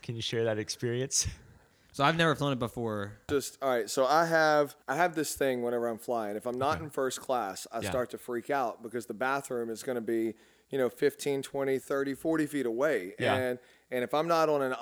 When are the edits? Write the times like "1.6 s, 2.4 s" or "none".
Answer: 3.3 s, 4.8 s